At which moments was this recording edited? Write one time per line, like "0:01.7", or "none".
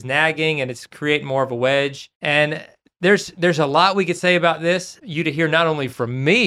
0:02.1
0:05.0